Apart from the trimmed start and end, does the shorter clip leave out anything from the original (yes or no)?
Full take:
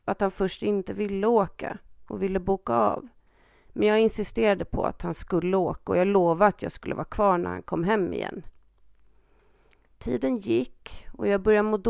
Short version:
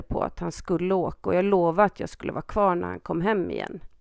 no